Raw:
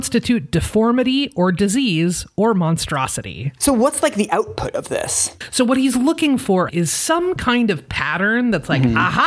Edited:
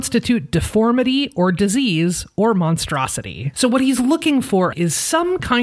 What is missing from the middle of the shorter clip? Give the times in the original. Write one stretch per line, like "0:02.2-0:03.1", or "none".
0:03.5-0:05.5